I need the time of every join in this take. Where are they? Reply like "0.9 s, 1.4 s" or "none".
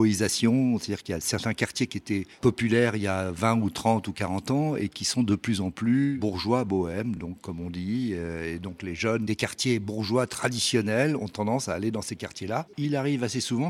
none